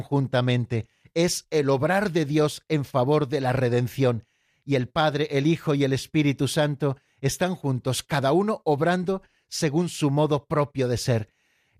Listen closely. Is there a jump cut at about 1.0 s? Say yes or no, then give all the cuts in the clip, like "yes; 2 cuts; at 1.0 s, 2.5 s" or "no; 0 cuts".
no; 0 cuts